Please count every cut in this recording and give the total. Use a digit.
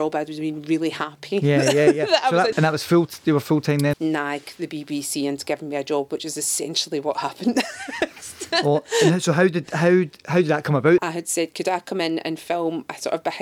3